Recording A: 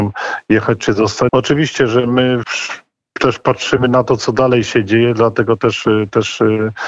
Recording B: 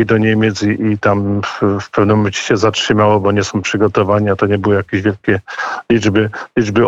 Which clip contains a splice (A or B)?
A